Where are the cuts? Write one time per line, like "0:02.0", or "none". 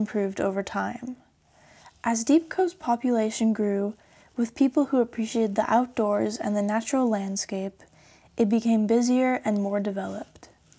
none